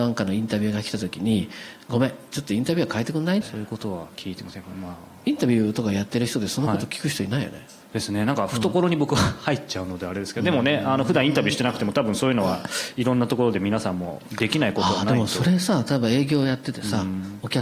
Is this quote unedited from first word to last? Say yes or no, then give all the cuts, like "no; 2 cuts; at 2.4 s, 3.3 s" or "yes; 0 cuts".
no; 1 cut; at 3.4 s